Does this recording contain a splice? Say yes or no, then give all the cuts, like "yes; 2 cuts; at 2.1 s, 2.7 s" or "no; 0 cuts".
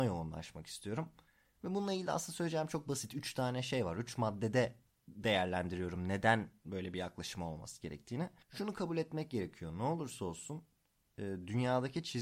no; 0 cuts